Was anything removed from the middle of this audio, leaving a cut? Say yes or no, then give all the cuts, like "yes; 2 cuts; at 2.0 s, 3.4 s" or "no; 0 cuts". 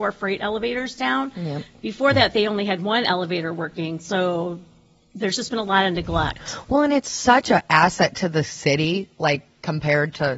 no; 0 cuts